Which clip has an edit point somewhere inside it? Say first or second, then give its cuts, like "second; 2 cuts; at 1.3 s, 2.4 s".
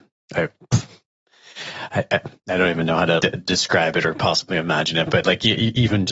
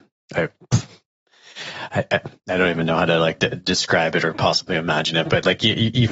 first; 1 cut; at 3.2 s